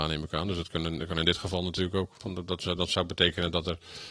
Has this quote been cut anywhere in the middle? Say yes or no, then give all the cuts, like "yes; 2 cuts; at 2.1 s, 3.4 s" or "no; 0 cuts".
yes; 1 cut; at 2.2 s